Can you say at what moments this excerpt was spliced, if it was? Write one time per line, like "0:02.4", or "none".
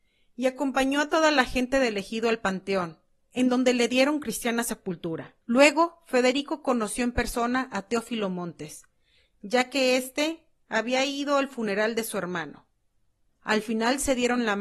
0:05.4
0:13.3